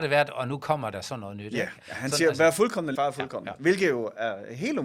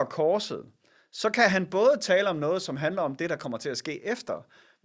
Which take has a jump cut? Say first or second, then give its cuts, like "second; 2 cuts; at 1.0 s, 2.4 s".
first; 2 cuts; at 1.8 s, 3.0 s